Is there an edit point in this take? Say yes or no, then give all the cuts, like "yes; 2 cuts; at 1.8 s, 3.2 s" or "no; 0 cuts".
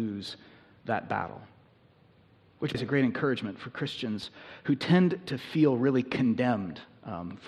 yes; 1 cut; at 2.7 s